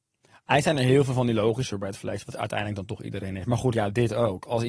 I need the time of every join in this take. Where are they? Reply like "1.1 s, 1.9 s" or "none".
3.7 s